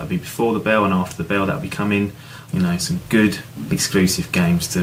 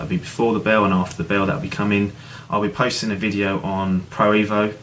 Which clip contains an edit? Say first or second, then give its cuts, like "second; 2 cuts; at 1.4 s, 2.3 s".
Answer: first; 1 cut; at 2.5 s